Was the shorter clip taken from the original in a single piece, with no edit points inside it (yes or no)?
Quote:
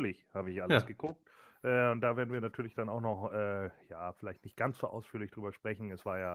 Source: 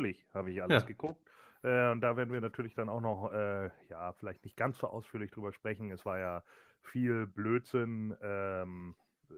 yes